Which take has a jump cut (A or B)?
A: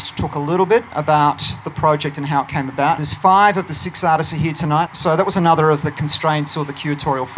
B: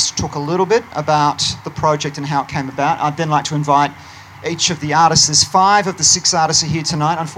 A